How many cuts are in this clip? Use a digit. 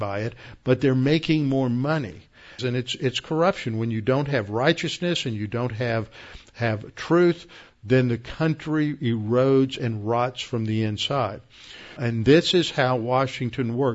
2